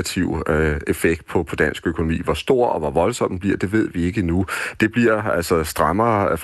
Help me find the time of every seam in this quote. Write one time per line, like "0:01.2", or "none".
0:04.8